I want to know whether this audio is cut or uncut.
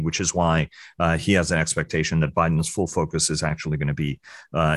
uncut